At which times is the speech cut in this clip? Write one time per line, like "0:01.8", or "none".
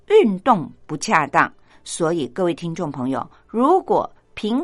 0:01.7